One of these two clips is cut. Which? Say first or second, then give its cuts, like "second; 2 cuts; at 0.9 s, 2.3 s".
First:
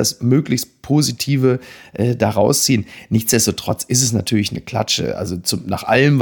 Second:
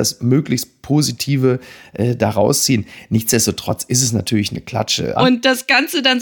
second; 1 cut; at 5.2 s